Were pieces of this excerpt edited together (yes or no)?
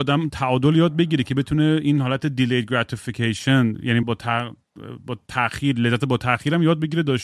yes